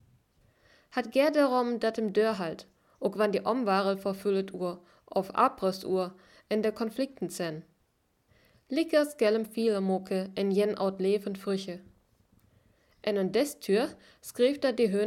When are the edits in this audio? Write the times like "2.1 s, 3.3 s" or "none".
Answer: none